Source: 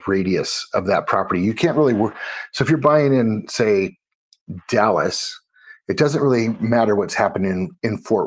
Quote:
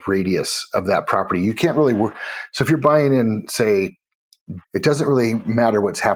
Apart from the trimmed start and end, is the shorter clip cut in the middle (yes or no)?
yes